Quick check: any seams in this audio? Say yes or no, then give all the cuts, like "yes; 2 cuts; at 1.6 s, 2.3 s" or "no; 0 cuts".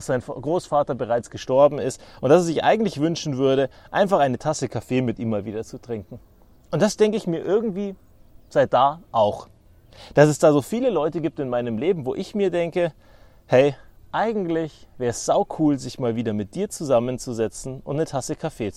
no; 0 cuts